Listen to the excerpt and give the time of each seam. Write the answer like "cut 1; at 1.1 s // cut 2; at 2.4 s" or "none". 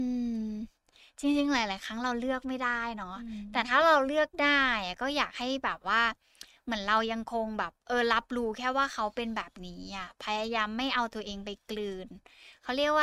cut 1; at 7.8 s